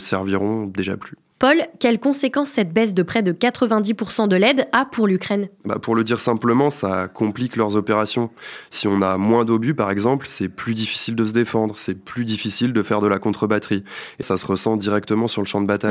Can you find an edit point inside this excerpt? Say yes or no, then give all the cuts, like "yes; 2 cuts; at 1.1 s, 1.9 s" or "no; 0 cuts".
yes; 1 cut; at 14.2 s